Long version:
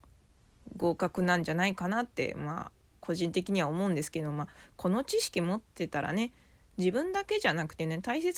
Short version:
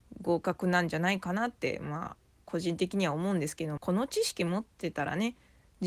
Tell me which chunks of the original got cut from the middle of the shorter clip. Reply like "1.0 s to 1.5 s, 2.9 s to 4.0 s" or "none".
4.3 s to 4.7 s